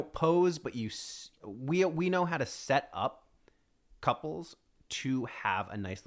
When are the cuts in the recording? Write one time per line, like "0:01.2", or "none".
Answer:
none